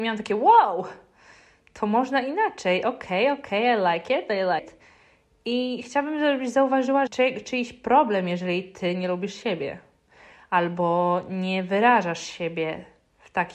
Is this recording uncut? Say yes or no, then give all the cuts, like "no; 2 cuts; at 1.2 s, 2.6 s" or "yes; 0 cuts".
no; 2 cuts; at 4.6 s, 7.1 s